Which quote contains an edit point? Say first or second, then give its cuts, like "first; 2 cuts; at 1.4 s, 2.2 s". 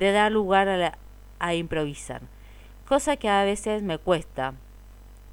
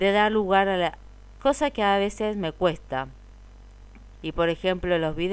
second; 2 cuts; at 1.4 s, 4.1 s